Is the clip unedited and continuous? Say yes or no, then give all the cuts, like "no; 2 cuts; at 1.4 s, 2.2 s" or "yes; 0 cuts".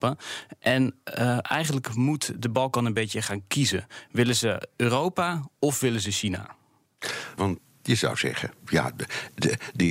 no; 1 cut; at 7.4 s